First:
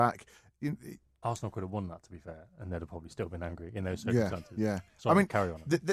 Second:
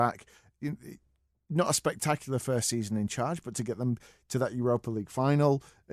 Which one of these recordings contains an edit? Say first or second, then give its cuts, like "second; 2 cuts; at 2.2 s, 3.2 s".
first; 1 cut; at 1.2 s